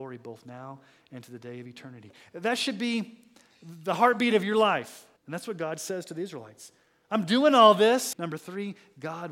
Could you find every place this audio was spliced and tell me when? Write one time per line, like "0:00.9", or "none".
0:05.2
0:08.1